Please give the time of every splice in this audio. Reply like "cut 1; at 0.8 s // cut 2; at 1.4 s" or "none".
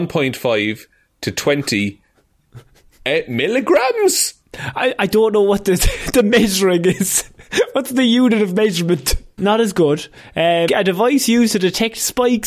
cut 1; at 9.4 s // cut 2; at 10.7 s